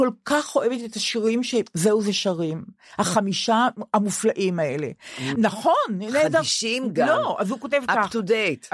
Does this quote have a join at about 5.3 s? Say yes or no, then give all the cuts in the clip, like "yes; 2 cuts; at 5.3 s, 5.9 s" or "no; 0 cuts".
yes; 1 cut; at 5.3 s